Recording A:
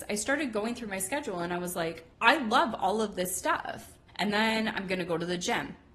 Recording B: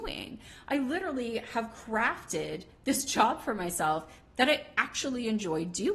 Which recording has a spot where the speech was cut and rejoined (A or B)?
A